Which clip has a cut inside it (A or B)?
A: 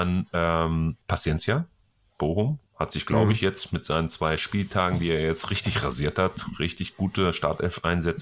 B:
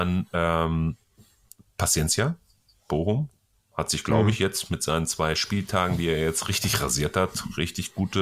A